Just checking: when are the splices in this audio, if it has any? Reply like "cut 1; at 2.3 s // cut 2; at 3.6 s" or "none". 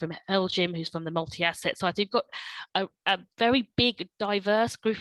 none